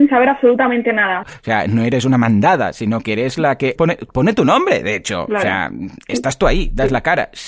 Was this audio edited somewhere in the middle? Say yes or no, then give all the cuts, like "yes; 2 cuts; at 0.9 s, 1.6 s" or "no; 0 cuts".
yes; 2 cuts; at 1.2 s, 3.8 s